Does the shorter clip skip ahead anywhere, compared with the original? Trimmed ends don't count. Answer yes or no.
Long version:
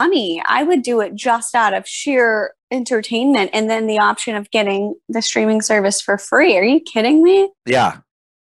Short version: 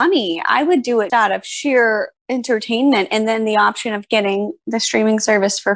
yes